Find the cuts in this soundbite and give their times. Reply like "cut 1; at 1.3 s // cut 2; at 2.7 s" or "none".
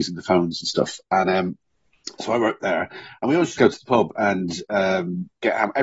cut 1; at 3.5 s